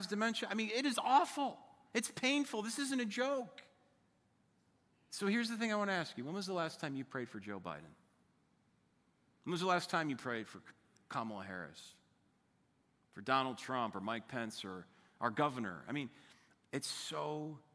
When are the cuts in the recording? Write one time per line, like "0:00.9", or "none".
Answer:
none